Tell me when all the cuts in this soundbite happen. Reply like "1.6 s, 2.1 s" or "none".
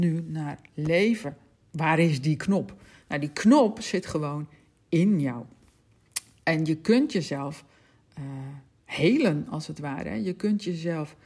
none